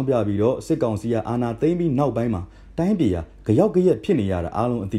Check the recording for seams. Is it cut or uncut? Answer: uncut